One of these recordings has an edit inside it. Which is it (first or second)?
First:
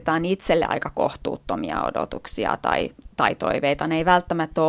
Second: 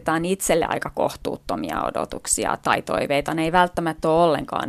second